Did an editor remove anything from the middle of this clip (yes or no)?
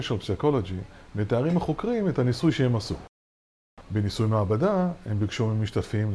yes